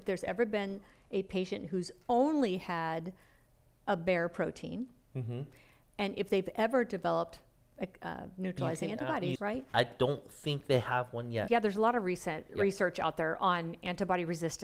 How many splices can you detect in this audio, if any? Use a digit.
2